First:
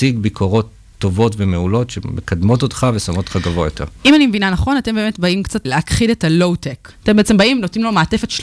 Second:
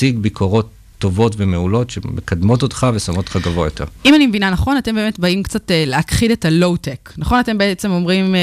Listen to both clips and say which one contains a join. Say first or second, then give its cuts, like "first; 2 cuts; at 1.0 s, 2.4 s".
first; 2 cuts; at 5.7 s, 6.9 s